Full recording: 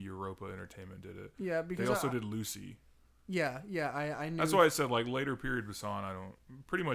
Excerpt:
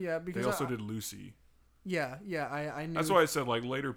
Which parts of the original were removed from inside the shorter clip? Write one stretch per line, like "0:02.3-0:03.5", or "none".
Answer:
none